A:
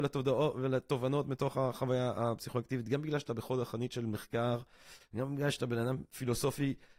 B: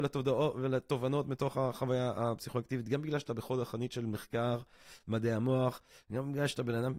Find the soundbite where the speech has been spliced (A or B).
A